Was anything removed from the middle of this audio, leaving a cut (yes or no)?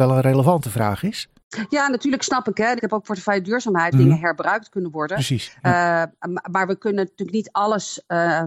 yes